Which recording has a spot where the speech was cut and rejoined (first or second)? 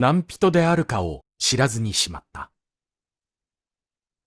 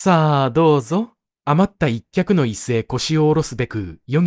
second